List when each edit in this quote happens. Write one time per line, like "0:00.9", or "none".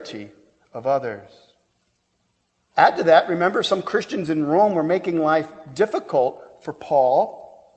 0:02.7